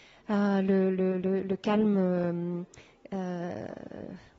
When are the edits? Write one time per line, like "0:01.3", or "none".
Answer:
none